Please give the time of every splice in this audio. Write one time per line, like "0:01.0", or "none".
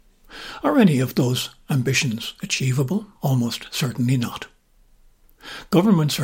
0:03.1